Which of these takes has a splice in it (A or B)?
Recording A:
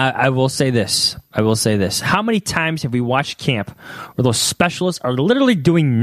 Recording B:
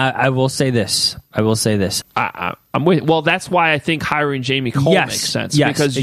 B